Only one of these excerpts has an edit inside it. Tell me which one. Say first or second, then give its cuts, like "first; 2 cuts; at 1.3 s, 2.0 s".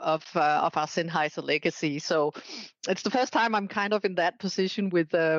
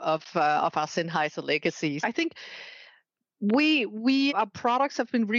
second; 2 cuts; at 2.0 s, 4.3 s